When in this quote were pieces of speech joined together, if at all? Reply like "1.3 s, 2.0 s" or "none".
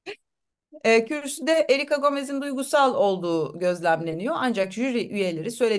1.1 s